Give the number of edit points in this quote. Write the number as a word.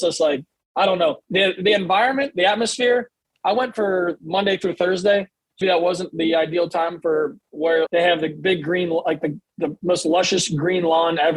three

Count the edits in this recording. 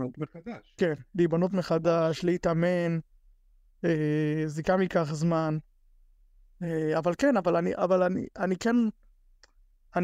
zero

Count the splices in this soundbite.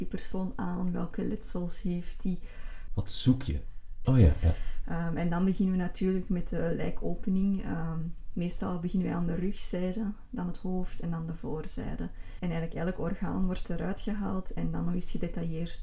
three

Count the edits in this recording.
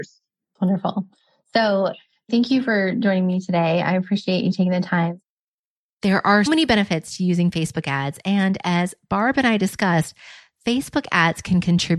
one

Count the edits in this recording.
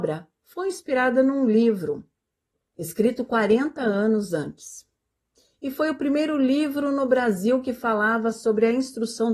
one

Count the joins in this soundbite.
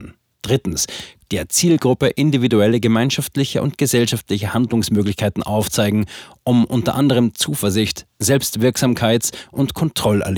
one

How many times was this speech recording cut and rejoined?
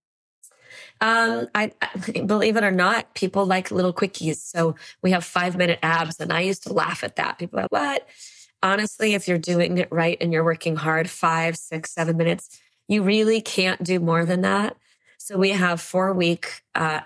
one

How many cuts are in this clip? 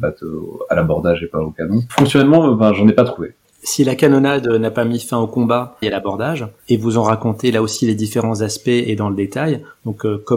two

